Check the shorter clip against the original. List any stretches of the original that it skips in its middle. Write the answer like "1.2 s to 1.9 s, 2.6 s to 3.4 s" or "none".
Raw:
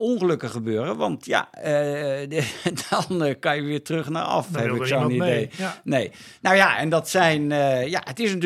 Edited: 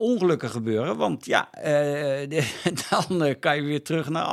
none